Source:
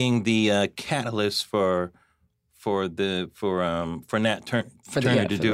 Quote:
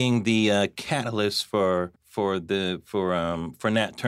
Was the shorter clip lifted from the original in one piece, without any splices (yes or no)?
no